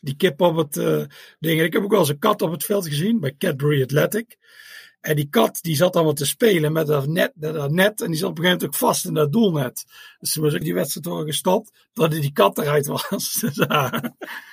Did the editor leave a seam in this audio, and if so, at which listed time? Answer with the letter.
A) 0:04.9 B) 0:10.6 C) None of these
B